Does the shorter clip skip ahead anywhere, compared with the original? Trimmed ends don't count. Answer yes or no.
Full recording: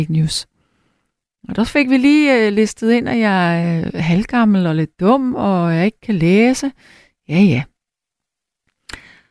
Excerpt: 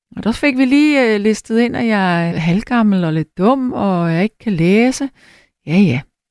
yes